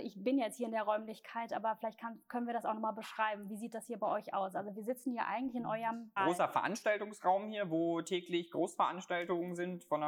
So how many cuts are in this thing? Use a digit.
1